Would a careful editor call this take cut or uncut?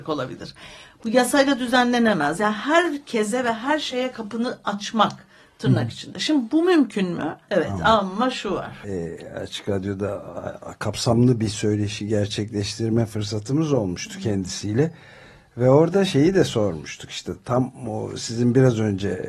cut